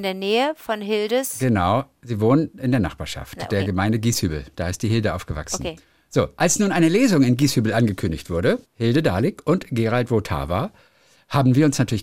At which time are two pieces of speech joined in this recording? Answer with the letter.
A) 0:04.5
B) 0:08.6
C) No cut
B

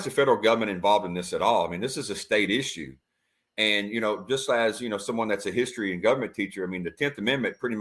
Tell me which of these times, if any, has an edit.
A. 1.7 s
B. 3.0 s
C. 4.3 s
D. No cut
D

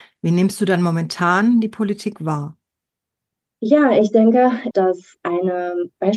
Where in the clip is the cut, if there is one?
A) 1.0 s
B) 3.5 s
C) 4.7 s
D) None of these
C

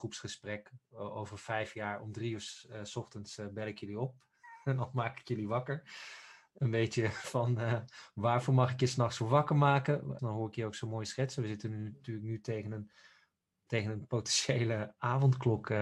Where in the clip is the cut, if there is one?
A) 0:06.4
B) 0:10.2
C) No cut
B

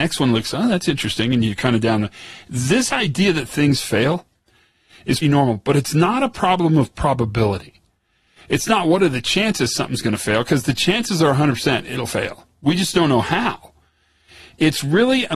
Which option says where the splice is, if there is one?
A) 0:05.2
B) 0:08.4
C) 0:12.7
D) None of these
A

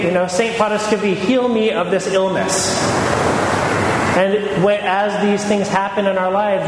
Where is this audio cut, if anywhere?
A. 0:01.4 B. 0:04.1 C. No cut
C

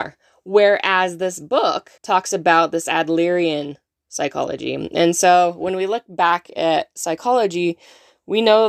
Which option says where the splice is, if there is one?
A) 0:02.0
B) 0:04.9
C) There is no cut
A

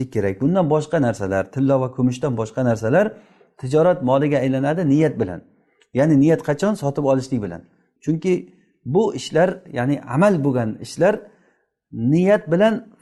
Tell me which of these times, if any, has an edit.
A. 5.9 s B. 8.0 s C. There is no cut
B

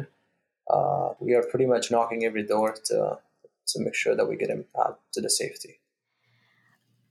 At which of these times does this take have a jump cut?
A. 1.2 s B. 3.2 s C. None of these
A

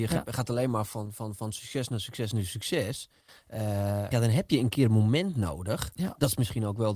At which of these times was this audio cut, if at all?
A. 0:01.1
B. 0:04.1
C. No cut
B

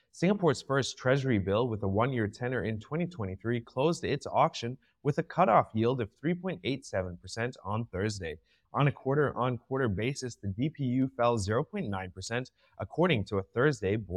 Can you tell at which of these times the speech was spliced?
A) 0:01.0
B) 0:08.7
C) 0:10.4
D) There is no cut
B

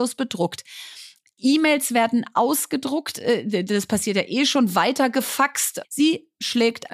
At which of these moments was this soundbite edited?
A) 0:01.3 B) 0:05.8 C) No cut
B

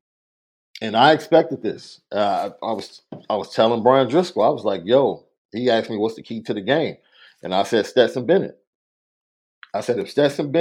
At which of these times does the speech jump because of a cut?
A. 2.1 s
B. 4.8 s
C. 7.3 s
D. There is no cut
D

